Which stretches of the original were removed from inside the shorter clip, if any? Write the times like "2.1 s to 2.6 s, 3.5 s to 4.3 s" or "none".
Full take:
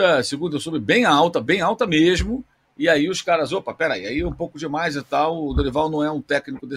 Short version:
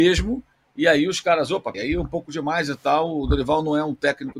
3.8 s to 4.0 s